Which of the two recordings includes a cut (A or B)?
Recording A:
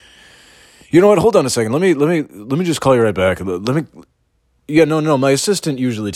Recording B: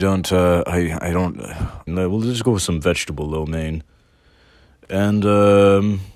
B